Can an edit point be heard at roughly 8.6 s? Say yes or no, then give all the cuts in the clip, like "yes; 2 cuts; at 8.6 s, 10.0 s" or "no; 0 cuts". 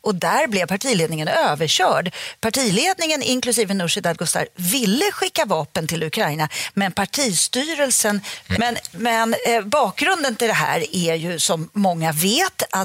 yes; 1 cut; at 8.6 s